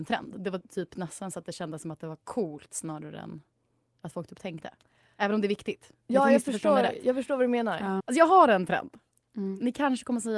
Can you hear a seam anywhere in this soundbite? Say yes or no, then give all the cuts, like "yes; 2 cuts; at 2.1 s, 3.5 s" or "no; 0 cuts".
yes; 1 cut; at 8.0 s